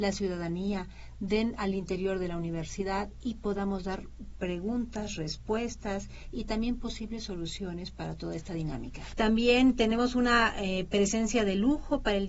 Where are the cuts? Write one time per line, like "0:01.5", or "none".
0:09.1